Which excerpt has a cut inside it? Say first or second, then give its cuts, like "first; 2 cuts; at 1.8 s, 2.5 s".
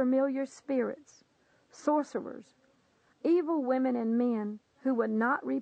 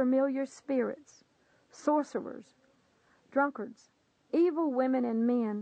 first; 1 cut; at 3.1 s